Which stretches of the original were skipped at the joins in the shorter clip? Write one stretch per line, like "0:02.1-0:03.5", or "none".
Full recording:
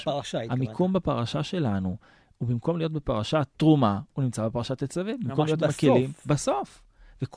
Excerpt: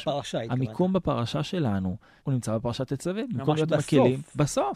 0:02.2-0:04.1